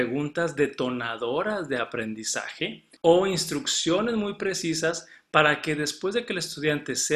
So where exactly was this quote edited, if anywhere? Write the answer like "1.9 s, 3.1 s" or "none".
3.0 s